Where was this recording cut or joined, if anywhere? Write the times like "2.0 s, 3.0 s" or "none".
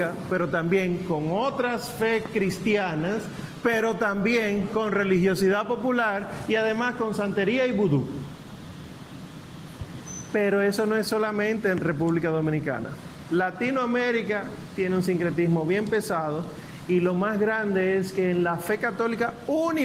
none